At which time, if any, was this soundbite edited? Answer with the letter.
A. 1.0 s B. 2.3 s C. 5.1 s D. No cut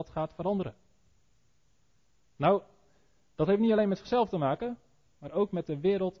B